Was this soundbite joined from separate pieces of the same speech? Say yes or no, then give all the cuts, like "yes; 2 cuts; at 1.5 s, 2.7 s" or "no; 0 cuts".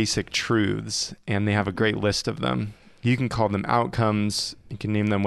no; 0 cuts